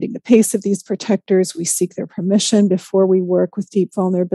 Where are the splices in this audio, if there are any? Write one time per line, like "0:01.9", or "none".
none